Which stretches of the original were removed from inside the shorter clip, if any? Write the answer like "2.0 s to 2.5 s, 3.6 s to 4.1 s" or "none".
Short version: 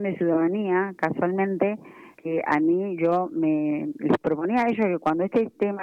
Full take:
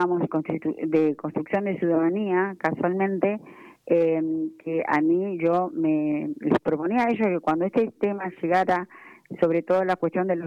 3.8 s to 4.6 s